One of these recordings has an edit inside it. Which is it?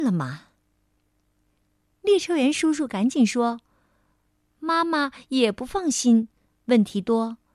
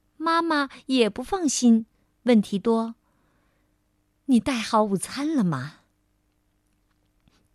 first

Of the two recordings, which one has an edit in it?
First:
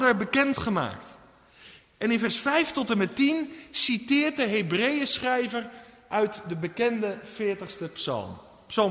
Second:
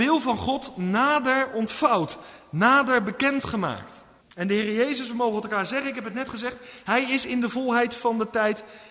second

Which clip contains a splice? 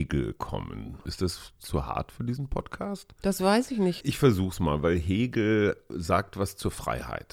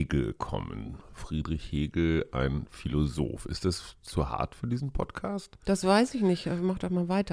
first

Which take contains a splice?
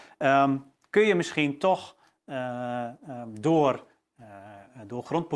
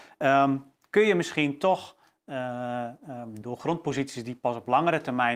second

